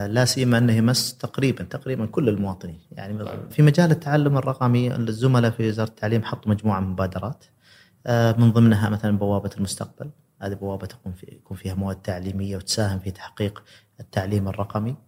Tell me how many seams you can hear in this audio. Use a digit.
1